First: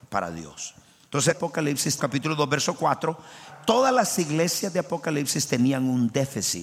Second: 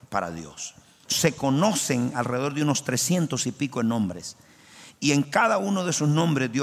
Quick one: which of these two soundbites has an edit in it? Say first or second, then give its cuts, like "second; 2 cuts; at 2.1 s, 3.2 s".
second; 1 cut; at 1.1 s